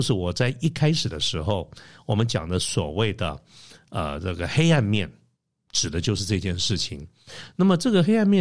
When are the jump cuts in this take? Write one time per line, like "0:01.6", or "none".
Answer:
none